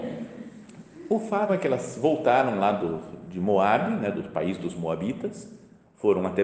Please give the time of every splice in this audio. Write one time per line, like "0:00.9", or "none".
0:01.5